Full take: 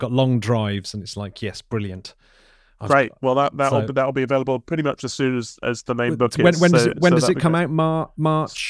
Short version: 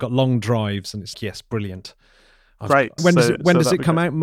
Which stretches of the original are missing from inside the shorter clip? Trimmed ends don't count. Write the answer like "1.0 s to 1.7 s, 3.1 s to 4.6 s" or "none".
1.1 s to 1.3 s, 3.2 s to 6.5 s